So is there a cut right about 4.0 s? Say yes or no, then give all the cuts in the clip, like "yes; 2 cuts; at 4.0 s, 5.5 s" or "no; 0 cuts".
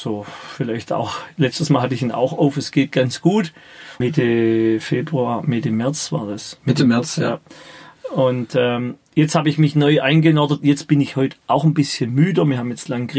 yes; 1 cut; at 4.0 s